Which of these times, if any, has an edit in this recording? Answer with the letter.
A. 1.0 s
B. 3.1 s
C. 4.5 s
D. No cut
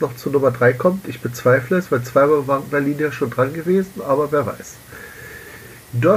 D